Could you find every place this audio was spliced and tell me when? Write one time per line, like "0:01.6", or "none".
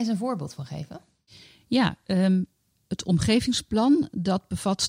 none